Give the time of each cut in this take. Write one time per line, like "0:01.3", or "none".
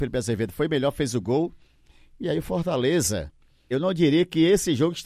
0:03.7